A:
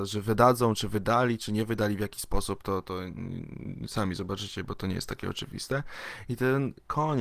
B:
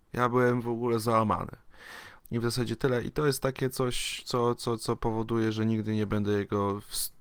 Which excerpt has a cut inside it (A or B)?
B